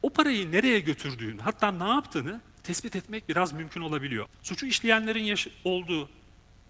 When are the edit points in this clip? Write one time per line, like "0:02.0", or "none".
0:04.3